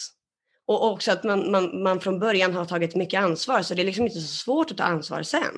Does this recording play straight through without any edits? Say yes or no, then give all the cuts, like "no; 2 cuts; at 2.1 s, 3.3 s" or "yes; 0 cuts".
yes; 0 cuts